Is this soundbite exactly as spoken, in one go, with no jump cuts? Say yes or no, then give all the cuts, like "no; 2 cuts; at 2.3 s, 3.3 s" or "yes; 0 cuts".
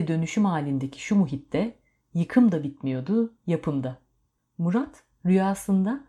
no; 1 cut; at 4.4 s